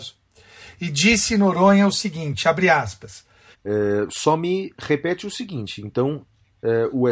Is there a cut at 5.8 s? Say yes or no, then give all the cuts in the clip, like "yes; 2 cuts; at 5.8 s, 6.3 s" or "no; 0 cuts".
no; 1 cut; at 3.5 s